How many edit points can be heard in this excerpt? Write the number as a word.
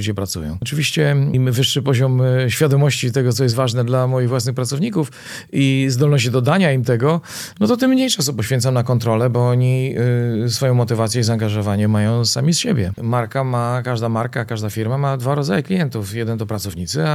one